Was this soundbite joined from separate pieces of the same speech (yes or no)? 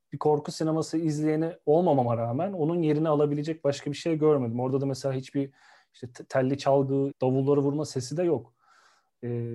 yes